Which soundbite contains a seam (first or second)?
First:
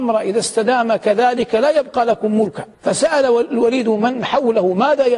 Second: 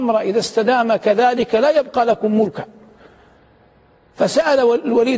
first